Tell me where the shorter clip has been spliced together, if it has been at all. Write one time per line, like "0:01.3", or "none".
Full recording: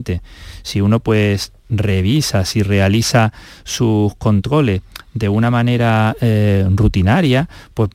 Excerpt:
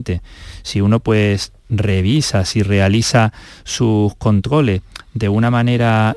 none

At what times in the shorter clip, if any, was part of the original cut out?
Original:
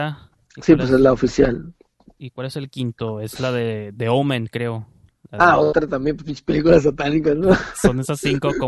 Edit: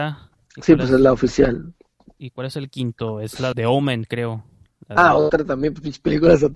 0:03.5

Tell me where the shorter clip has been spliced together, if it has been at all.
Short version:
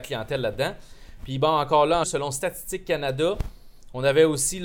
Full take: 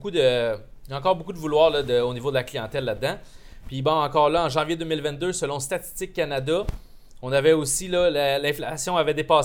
0:02.0

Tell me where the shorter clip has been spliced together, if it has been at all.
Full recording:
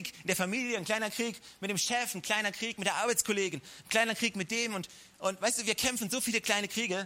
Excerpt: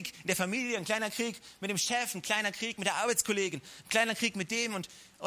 none

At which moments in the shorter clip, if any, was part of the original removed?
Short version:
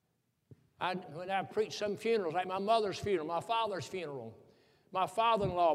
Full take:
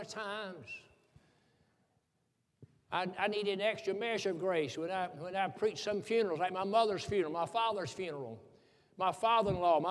0:01.0

